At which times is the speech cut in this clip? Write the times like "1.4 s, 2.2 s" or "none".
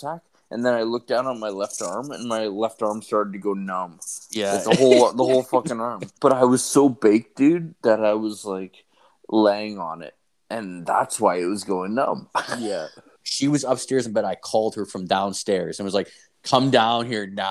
6.2 s, 13.2 s